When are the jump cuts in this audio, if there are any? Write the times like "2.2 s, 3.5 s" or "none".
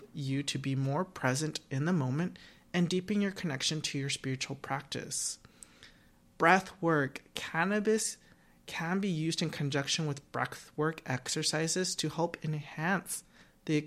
none